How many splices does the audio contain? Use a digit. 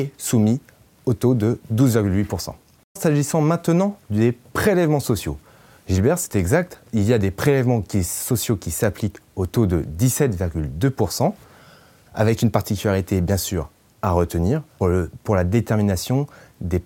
2